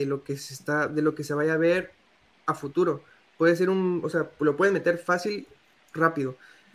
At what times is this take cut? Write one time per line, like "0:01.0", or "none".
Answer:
none